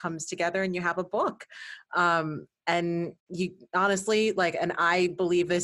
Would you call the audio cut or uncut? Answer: cut